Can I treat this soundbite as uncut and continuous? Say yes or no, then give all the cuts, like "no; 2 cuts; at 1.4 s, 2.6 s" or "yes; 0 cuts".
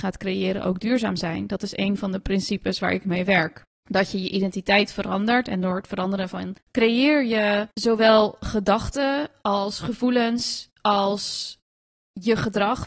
no; 2 cuts; at 6.6 s, 7.7 s